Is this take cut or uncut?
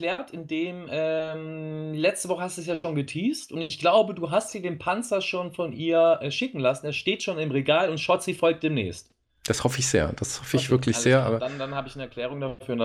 uncut